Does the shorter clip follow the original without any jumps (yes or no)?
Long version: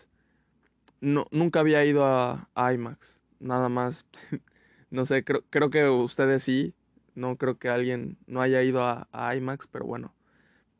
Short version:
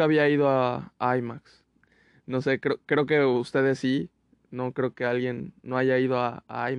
no